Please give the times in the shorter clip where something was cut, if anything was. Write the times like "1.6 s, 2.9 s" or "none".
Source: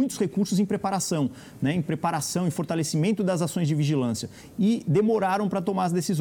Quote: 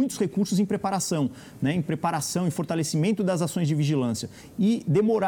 none